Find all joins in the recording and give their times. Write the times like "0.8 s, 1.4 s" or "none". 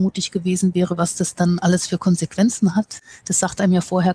1.0 s